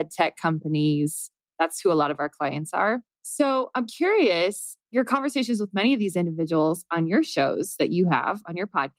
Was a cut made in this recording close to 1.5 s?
no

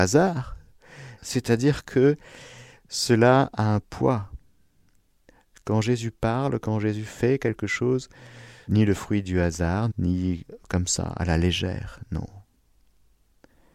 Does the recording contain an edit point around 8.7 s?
yes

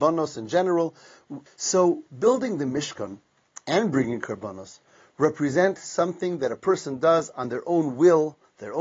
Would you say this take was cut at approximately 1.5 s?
yes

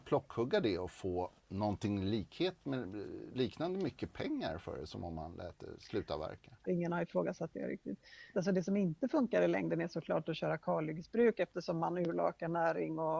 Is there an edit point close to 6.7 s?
yes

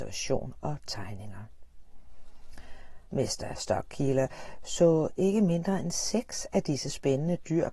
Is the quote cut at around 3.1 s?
yes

